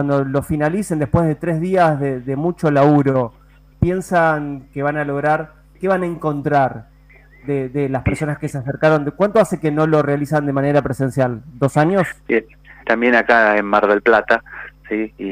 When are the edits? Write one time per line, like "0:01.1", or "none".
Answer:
0:03.7
0:12.8